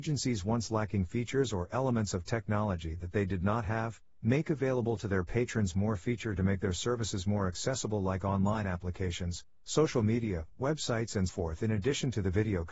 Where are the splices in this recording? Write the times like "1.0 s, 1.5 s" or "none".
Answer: 11.3 s